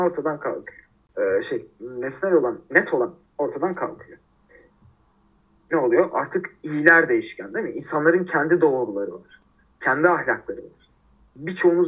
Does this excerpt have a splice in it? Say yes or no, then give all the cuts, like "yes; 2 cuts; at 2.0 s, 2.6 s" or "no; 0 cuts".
no; 0 cuts